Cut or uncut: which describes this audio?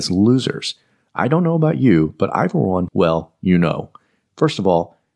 cut